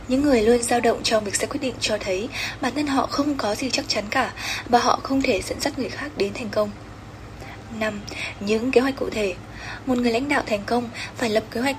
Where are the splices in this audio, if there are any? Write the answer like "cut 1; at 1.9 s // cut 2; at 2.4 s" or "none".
none